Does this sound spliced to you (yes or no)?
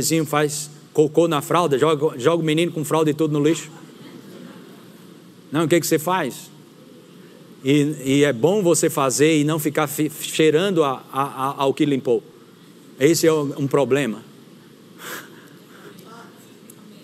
no